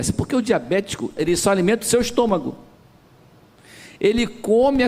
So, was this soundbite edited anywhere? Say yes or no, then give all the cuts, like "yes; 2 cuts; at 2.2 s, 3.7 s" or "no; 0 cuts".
yes; 1 cut; at 1.2 s